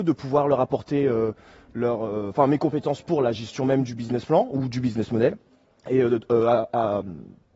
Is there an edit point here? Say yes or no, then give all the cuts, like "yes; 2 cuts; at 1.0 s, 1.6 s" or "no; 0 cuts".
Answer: no; 0 cuts